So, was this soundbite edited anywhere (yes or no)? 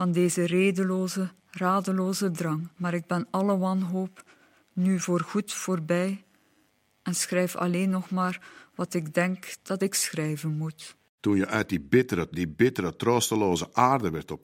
yes